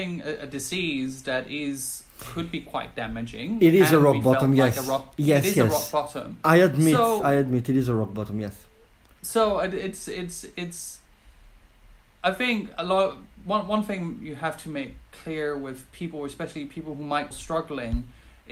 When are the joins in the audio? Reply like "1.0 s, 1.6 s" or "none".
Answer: 17.3 s